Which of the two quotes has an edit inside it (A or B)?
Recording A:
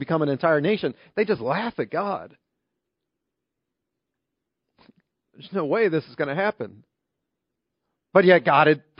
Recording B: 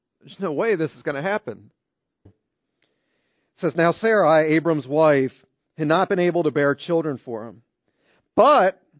B